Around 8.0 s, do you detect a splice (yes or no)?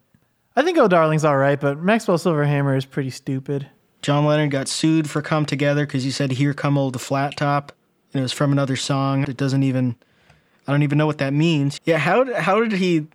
no